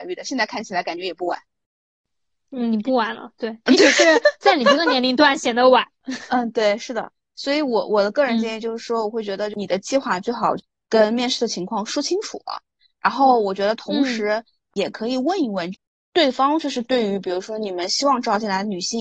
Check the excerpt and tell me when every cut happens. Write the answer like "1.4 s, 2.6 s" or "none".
none